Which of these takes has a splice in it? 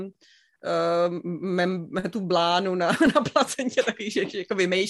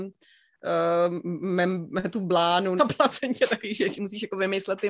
second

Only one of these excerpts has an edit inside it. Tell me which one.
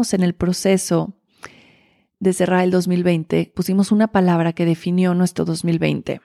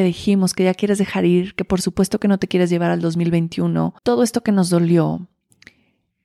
second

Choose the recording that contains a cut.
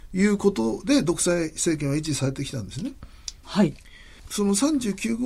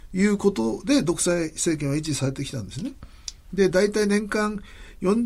first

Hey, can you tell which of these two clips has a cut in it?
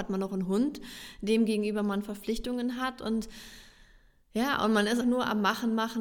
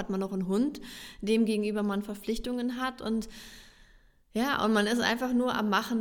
first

